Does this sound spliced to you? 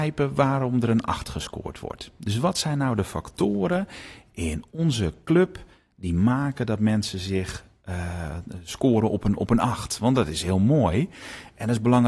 no; 0 cuts

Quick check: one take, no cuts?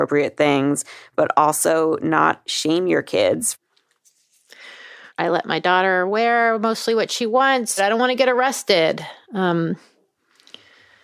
no; 2 cuts; at 5.1 s, 7.8 s

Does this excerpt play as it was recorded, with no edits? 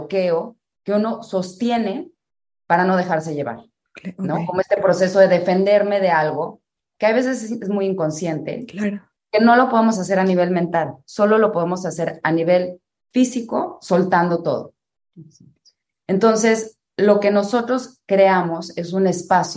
yes; 0 cuts

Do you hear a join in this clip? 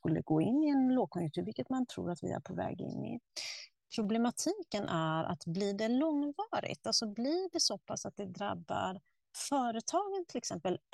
no; 0 cuts

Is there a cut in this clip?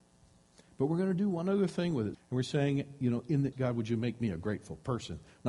yes; 2 cuts; at 2.1 s, 3.5 s

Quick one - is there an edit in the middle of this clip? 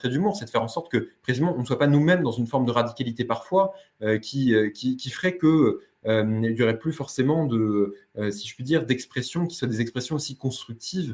no; 0 cuts

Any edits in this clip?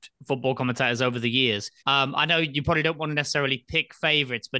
yes; 1 cut; at 1.8 s

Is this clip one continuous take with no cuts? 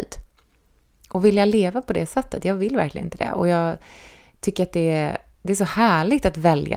yes; 0 cuts

